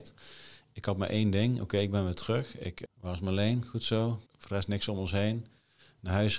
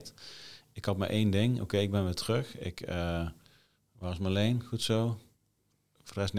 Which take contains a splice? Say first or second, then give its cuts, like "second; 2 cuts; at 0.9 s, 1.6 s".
first; 2 cuts; at 2.9 s, 4.3 s